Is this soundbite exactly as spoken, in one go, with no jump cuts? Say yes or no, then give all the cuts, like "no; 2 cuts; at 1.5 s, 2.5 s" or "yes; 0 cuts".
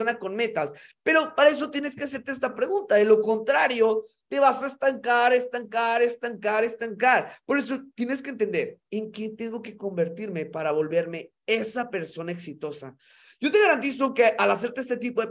yes; 0 cuts